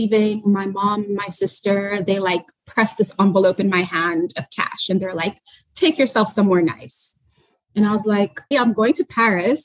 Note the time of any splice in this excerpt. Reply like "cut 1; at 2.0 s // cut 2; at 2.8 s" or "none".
cut 1; at 8.5 s